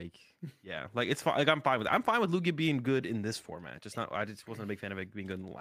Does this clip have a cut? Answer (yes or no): no